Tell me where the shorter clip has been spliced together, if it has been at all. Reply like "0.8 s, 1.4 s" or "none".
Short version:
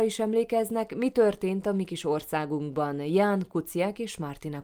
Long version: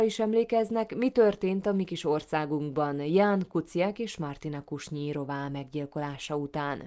none

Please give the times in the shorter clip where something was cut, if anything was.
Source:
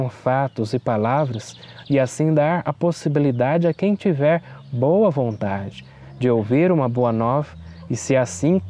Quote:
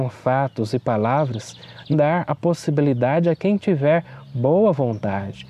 1.9 s

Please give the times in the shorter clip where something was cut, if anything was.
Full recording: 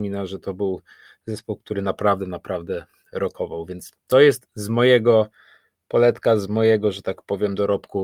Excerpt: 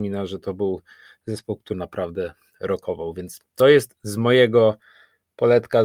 1.7 s

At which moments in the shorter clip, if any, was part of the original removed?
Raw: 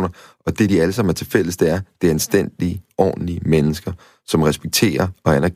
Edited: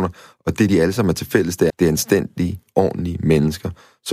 1.7 s

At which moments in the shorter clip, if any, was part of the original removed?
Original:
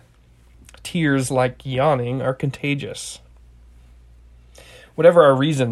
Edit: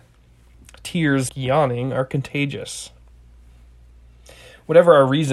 1.3 s

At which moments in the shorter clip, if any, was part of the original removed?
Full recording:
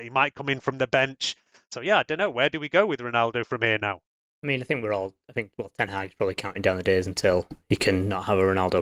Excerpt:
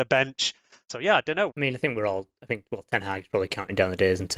1.5 s

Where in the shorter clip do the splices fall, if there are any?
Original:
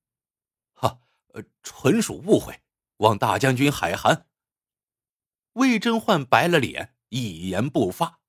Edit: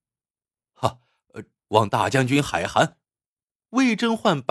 1.6 s, 3.0 s

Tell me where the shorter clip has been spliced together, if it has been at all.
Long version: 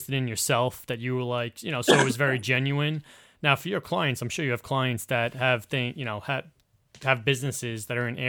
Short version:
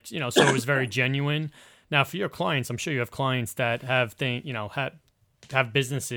none

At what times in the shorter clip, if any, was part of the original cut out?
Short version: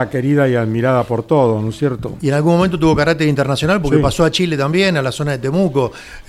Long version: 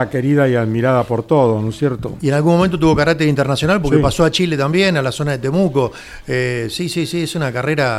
none

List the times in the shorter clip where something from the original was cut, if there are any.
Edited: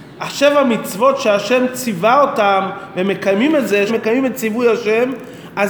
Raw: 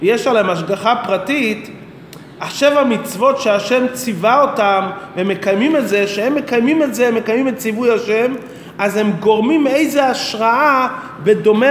3.9 s

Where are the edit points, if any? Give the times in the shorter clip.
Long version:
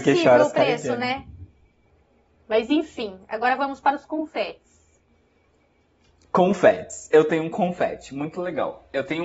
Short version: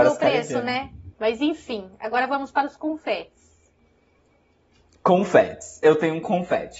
1.1 s

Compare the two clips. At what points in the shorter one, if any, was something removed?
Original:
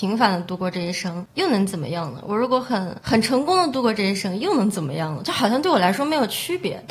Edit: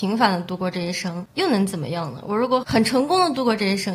2.6 s

